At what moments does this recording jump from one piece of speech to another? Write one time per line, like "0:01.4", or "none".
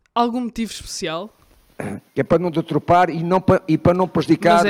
0:02.1